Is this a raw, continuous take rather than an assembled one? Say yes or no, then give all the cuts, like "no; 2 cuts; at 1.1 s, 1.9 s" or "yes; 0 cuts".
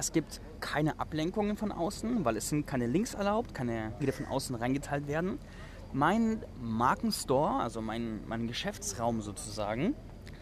no; 2 cuts; at 4.0 s, 5.9 s